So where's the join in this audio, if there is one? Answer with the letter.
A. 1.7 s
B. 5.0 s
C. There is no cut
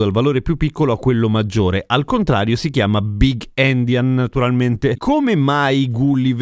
B